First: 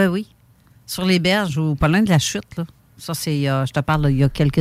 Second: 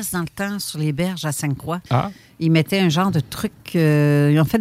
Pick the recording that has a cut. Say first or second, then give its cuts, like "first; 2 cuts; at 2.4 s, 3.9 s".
second; 1 cut; at 1.9 s